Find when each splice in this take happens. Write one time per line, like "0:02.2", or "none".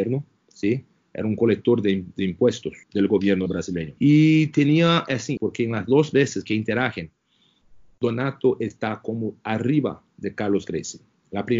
0:02.8
0:04.0
0:05.4